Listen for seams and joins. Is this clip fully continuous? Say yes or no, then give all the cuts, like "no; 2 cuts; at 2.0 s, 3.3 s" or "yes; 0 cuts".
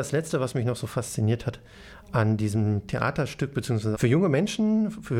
no; 1 cut; at 3.9 s